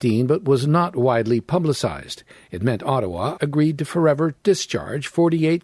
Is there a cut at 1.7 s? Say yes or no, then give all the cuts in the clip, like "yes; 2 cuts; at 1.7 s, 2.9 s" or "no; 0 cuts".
no; 1 cut; at 3.4 s